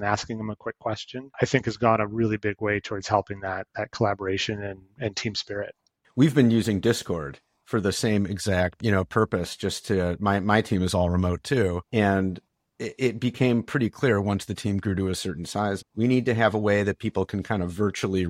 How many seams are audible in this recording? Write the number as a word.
two